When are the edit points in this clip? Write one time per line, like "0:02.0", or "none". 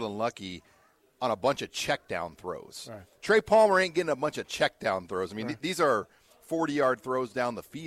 none